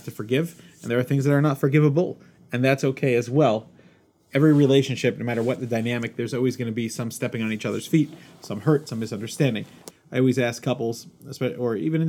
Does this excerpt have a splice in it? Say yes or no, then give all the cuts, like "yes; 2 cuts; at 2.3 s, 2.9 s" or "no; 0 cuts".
yes; 1 cut; at 9.9 s